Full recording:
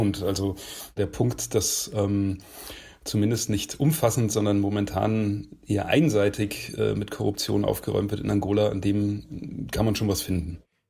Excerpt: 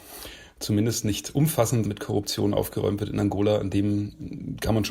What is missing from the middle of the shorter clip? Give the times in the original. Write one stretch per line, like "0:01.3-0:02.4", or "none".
0:04.3-0:06.9